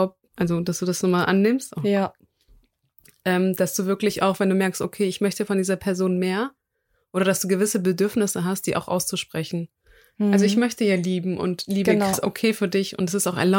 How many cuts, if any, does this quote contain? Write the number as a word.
two